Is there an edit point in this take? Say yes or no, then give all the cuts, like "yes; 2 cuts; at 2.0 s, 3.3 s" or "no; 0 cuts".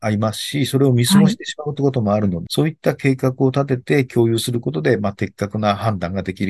yes; 1 cut; at 2.5 s